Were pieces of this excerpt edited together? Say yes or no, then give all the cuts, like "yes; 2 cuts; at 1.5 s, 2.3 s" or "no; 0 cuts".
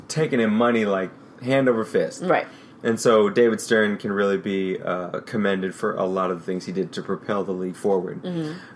no; 0 cuts